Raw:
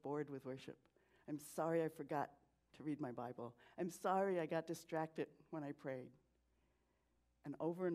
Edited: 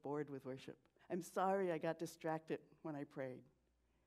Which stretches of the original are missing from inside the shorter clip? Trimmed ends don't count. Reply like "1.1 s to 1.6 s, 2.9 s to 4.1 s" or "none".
1.0 s to 3.7 s